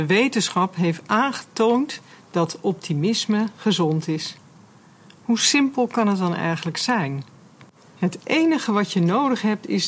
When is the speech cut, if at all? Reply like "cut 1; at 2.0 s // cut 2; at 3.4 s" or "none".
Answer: none